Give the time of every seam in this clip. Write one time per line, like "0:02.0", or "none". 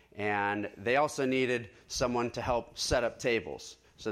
none